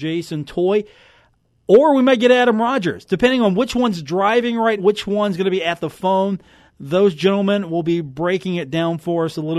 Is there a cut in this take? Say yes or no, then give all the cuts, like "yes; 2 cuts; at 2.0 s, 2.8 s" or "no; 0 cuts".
yes; 1 cut; at 4.8 s